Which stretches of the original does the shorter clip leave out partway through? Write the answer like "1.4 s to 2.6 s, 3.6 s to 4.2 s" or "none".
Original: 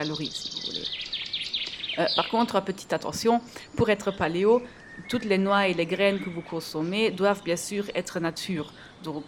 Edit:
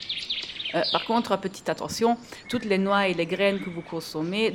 3.7 s to 5.0 s